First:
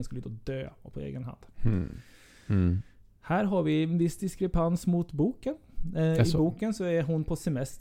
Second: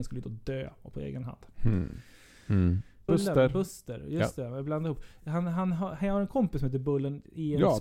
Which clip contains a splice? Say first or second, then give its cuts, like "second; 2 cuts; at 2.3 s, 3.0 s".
second; 1 cut; at 3.1 s